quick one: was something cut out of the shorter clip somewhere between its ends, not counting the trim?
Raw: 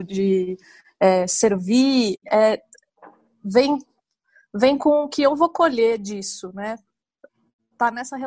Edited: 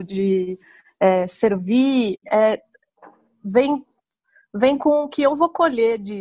no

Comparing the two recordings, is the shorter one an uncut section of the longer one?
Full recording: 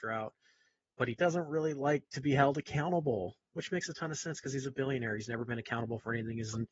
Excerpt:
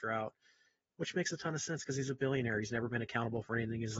no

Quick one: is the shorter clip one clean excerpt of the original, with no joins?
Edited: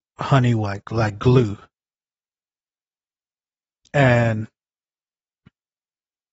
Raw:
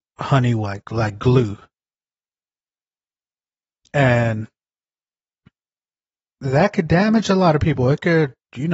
yes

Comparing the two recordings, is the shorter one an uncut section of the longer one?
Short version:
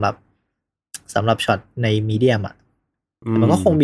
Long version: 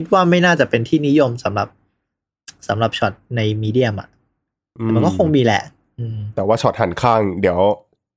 yes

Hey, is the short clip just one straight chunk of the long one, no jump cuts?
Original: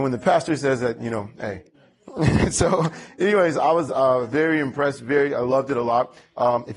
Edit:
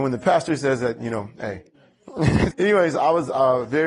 no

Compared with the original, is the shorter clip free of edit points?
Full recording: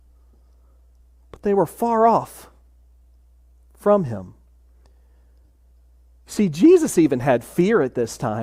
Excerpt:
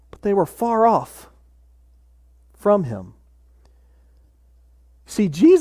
yes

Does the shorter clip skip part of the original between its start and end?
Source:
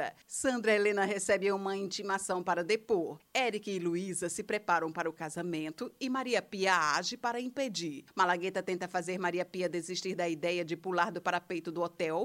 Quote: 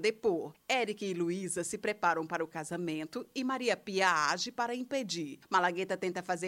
no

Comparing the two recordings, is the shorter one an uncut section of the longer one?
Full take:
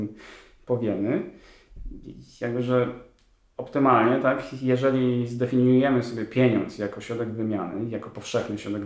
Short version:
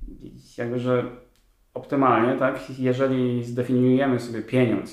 yes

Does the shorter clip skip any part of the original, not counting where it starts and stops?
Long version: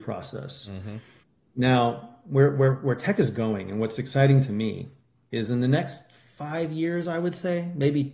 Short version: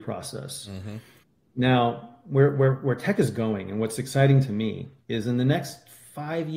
yes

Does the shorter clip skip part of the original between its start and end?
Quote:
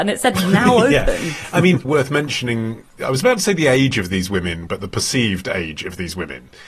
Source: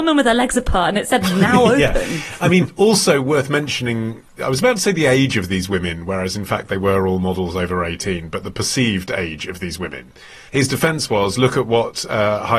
yes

